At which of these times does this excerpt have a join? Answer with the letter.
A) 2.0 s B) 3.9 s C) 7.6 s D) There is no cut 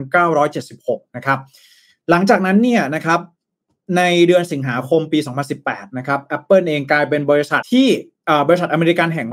C